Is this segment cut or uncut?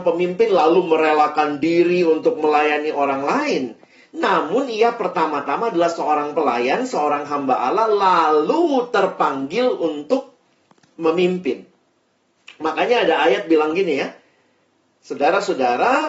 uncut